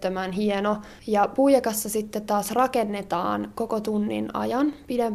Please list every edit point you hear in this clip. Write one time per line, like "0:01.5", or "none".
0:01.0